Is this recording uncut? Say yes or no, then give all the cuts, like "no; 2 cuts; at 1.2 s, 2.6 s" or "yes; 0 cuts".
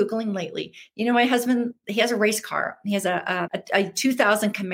no; 1 cut; at 3.4 s